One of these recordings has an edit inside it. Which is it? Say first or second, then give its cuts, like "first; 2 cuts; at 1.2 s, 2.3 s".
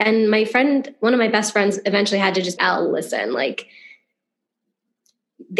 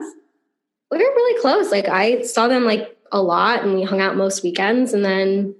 first; 1 cut; at 2.6 s